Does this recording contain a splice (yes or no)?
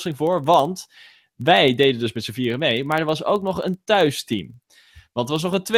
no